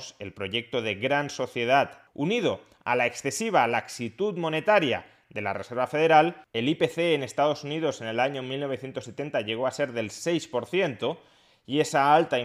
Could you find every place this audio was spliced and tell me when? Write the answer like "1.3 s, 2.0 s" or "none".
2.1 s, 6.5 s

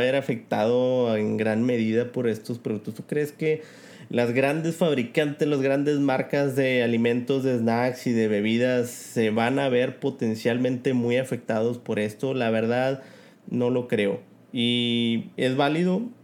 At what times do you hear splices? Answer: none

